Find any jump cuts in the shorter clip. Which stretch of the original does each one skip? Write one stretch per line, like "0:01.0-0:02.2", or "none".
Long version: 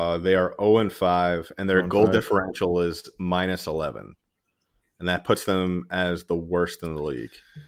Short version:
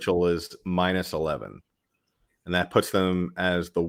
none